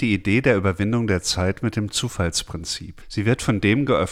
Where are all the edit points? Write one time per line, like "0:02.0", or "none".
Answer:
none